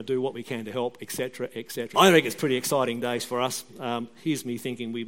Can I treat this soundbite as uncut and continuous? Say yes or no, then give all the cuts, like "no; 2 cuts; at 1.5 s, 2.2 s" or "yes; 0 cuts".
no; 1 cut; at 1.9 s